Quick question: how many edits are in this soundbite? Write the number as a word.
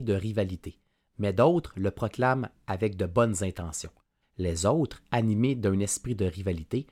one